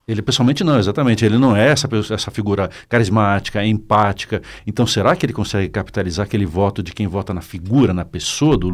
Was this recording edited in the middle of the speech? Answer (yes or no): no